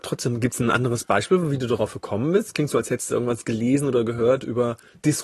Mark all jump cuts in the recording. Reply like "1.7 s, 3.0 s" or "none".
none